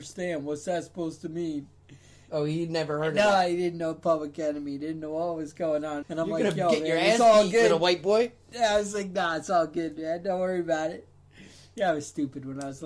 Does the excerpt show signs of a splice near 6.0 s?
yes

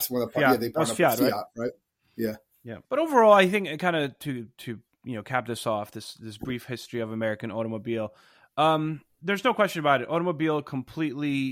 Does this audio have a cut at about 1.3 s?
no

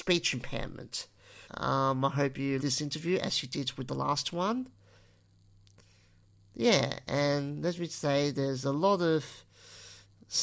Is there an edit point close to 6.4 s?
no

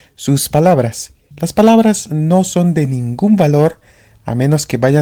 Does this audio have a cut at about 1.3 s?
yes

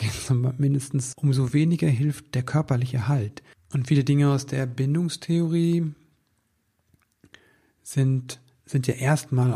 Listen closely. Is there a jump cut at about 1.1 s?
yes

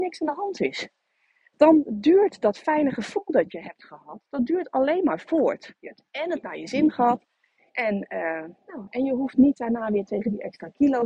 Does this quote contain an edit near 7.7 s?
yes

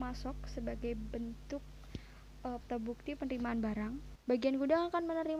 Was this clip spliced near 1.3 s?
no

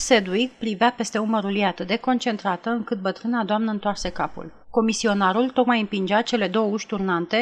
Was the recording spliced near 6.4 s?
no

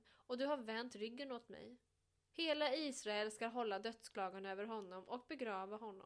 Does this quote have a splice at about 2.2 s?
yes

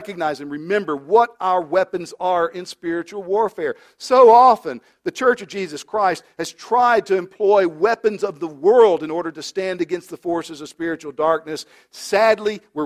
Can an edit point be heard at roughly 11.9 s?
no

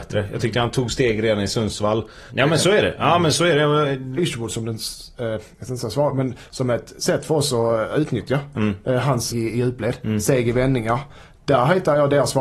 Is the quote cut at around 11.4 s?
no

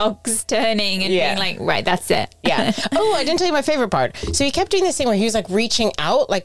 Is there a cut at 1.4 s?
no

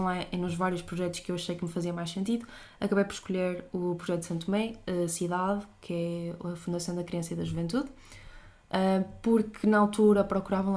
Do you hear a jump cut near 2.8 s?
no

